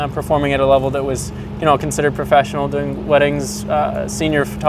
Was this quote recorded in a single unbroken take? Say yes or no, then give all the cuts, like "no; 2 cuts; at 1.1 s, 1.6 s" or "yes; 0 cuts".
yes; 0 cuts